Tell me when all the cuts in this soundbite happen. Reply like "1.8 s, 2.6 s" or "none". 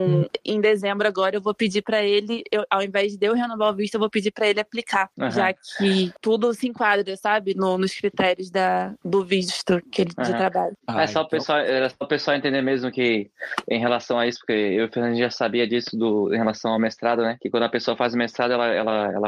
none